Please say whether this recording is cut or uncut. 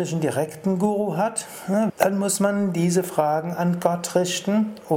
cut